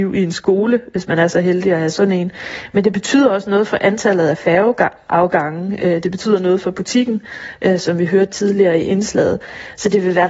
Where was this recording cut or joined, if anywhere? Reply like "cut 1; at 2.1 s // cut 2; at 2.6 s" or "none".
none